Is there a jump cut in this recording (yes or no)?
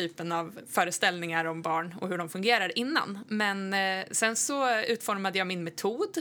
no